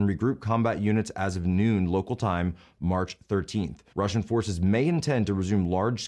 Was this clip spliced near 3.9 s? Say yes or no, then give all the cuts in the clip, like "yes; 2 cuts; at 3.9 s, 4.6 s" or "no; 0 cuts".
yes; 1 cut; at 3.9 s